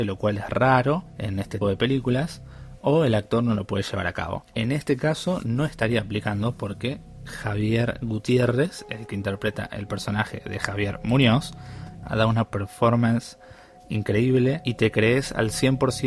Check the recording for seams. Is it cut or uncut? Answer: cut